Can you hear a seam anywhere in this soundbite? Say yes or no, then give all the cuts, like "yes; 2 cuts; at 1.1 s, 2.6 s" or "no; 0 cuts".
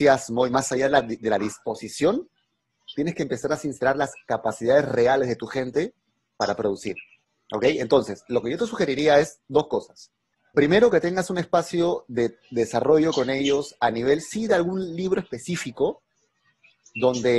no; 0 cuts